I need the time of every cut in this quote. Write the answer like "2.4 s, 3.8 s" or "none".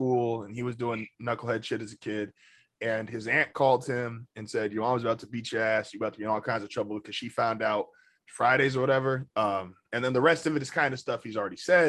8.2 s, 9.3 s